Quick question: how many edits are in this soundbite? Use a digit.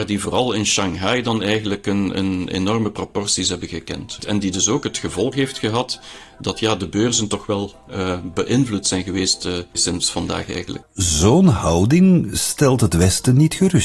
2